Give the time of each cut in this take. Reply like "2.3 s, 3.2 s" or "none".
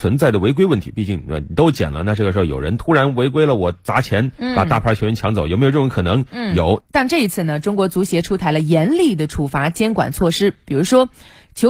6.8 s